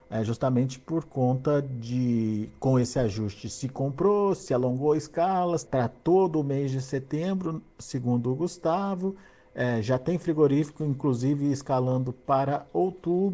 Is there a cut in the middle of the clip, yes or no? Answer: yes